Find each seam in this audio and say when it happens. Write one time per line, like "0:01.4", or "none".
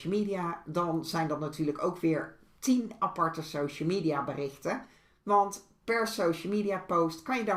none